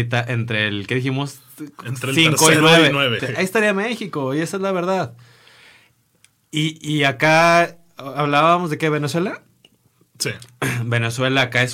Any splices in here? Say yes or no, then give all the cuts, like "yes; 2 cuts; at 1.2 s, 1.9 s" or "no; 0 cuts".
yes; 1 cut; at 3.2 s